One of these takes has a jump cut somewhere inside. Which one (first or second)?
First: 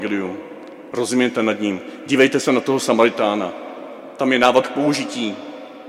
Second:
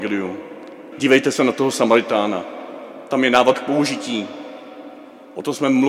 second